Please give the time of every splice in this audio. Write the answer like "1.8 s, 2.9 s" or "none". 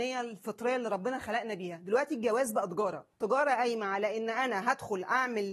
3.1 s